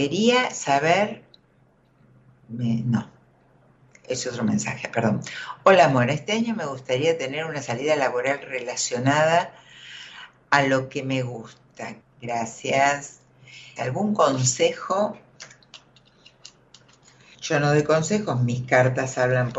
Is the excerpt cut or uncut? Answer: cut